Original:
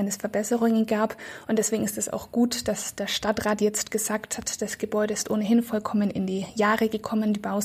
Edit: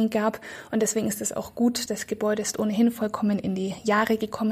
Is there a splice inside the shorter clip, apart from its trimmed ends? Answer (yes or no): yes